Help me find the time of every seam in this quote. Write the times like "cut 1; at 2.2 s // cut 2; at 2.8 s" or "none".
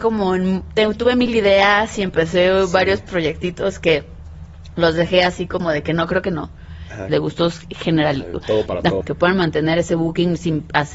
cut 1; at 7.1 s // cut 2; at 9.0 s